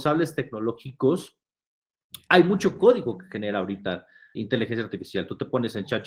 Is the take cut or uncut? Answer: cut